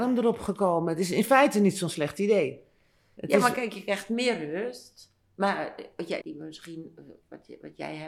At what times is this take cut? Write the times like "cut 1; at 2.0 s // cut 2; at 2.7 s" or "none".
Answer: cut 1; at 6.2 s